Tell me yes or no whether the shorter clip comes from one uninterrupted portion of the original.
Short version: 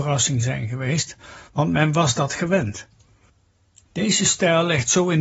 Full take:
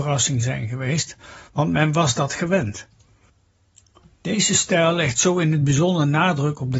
no